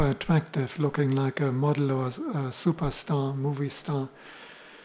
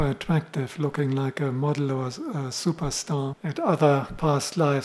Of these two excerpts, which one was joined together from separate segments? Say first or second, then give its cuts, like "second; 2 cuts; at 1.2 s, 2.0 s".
second; 1 cut; at 3.3 s